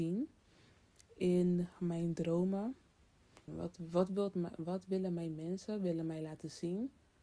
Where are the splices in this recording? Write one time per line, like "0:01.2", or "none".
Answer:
0:03.5